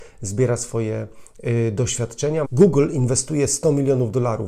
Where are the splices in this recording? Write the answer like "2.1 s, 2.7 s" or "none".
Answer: 2.4 s